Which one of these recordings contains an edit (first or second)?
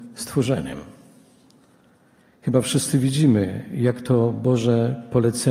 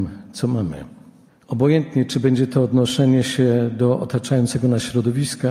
second